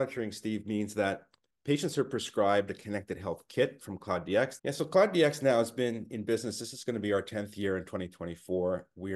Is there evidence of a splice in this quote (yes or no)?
yes